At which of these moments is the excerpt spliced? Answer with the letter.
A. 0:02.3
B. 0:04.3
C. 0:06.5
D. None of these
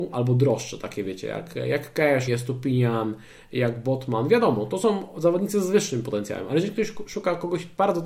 A